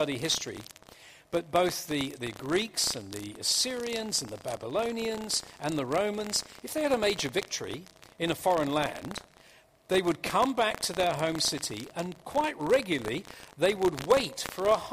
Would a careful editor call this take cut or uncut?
uncut